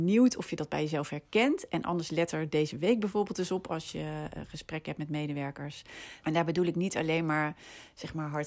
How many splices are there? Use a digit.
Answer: 1